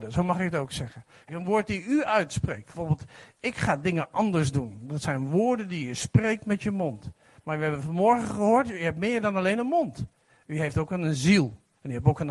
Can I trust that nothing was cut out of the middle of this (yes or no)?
no